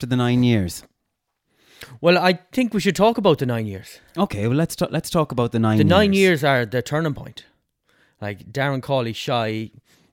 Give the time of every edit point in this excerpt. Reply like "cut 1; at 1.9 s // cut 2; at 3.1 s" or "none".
none